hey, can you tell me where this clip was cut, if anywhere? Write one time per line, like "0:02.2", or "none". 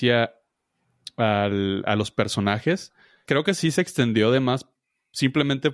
0:03.2